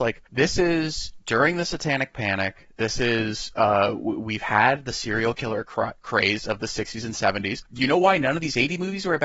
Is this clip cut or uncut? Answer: uncut